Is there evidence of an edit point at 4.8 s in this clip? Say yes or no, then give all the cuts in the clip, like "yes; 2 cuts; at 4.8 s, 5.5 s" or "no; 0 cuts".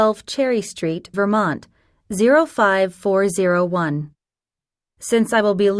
no; 1 cut; at 1.1 s